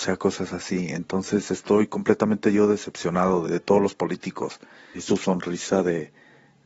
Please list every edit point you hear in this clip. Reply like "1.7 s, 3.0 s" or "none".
3.4 s, 4.9 s